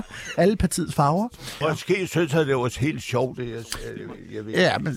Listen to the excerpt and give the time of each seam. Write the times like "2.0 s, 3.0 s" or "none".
1.6 s